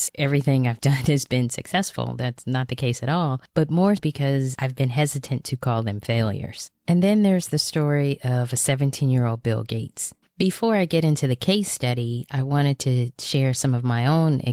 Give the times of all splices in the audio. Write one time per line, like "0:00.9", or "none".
0:04.0
0:06.7
0:10.2